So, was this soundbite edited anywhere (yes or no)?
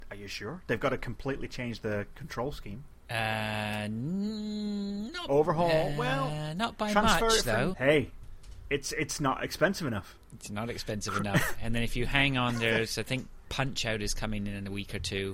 yes